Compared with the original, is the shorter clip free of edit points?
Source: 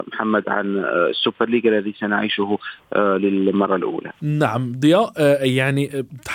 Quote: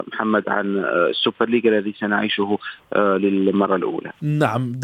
yes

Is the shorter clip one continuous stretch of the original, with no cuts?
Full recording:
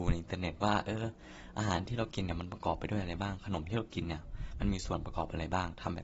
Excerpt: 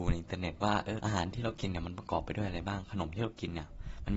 no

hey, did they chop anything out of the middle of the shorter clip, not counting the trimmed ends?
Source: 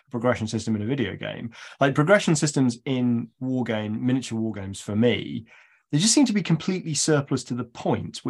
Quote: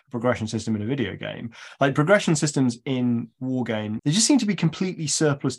yes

